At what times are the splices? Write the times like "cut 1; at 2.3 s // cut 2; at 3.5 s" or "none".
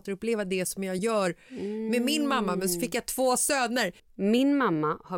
cut 1; at 4.0 s